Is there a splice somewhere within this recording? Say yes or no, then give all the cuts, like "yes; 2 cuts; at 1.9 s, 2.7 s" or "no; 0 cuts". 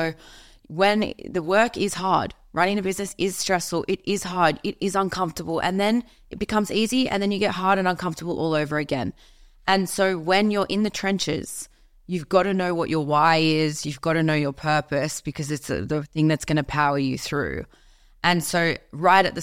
no; 0 cuts